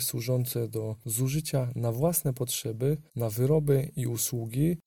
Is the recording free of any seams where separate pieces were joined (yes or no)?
no